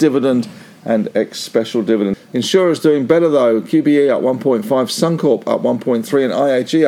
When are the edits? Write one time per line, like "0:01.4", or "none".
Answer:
0:02.1